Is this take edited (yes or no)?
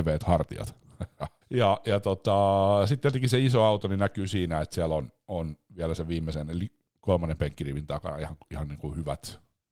yes